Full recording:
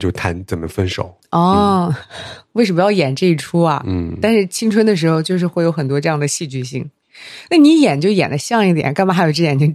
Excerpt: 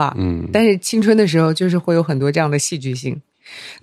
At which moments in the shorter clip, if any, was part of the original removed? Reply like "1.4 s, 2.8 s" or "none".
none